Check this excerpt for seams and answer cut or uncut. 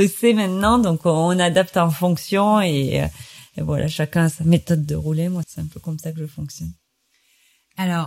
cut